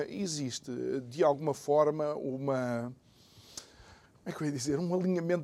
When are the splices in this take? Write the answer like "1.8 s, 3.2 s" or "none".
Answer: none